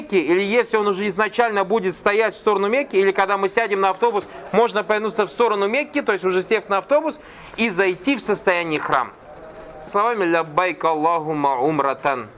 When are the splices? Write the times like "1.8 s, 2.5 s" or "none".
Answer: 9.9 s